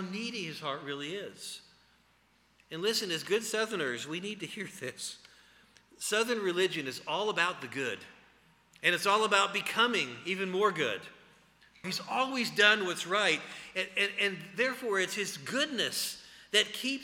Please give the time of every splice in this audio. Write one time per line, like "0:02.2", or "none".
0:11.8